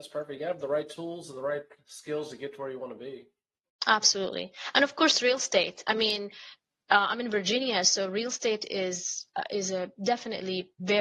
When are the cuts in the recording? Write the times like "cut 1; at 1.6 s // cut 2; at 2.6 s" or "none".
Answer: none